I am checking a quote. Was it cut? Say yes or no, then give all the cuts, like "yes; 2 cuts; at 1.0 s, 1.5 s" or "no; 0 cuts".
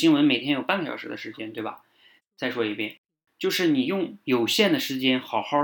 yes; 1 cut; at 2.2 s